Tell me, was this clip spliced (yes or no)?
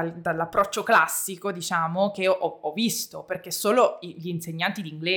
no